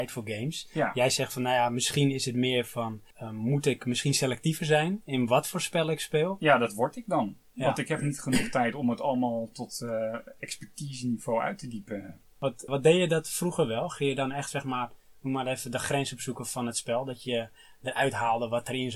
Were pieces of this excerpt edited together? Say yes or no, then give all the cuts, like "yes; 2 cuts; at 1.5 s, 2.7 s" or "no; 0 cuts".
yes; 2 cuts; at 3.1 s, 12.7 s